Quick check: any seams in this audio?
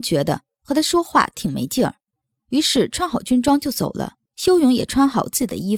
yes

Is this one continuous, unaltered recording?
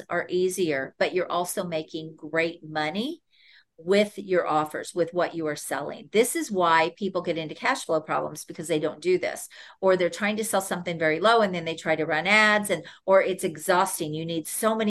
yes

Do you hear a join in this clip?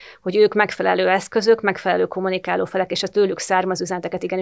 no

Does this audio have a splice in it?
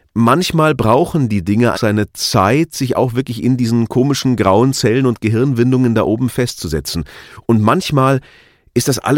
yes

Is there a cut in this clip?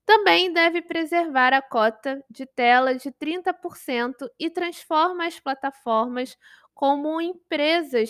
no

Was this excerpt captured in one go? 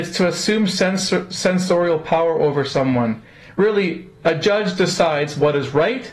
yes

